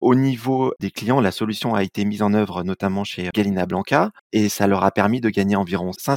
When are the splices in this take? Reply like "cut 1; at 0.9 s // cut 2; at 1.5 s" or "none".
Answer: cut 1; at 3.3 s